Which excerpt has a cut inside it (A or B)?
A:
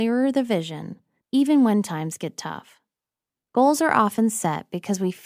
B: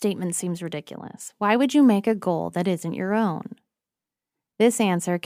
A